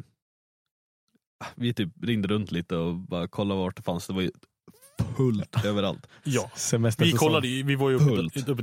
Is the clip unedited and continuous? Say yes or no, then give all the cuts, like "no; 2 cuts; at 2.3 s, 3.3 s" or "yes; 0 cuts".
yes; 0 cuts